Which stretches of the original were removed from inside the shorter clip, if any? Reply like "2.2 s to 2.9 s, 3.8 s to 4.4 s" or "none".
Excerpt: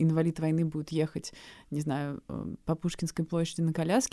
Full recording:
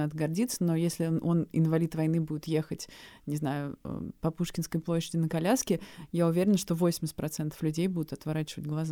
none